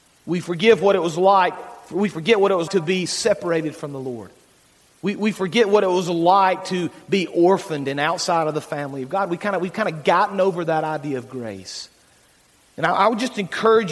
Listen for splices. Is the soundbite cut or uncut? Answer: cut